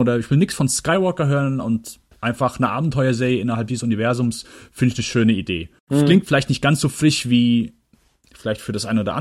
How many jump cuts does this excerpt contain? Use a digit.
1